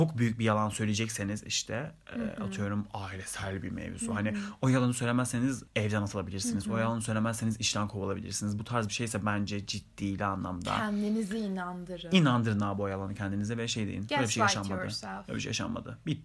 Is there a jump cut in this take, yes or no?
no